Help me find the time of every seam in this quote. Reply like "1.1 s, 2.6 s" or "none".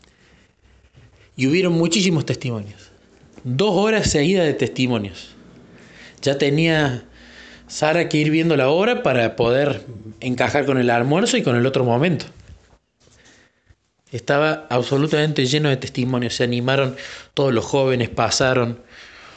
none